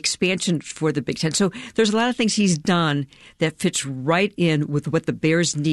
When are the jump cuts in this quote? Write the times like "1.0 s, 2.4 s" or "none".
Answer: none